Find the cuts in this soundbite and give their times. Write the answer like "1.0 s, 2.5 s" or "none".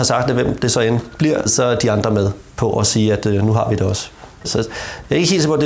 1.5 s, 4.4 s

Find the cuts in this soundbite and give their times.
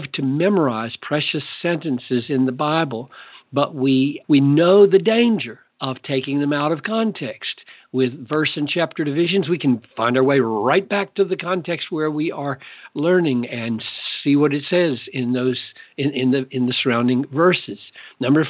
none

